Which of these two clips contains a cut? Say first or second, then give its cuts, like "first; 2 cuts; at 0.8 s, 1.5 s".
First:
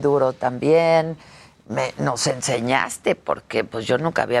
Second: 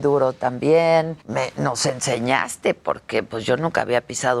second; 1 cut; at 1.2 s